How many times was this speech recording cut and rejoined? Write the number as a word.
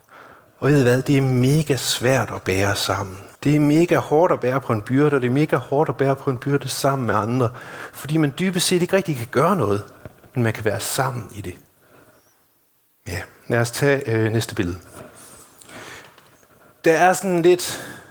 one